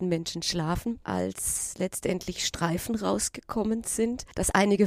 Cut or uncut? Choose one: cut